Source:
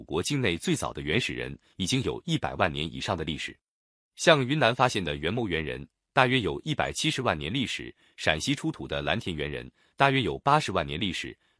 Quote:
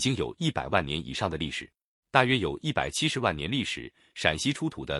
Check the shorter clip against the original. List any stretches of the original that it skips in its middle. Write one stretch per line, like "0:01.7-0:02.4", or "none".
0:03.9-0:06.0